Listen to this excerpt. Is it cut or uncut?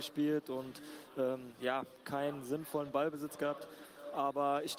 uncut